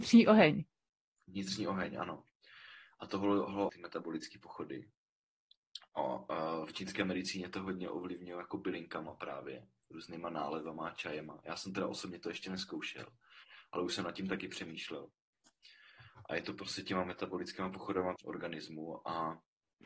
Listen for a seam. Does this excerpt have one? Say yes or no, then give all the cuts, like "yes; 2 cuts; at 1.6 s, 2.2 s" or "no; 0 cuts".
yes; 2 cuts; at 3.7 s, 18.2 s